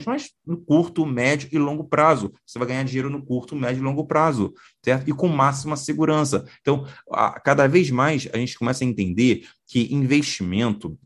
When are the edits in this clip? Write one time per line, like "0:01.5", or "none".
none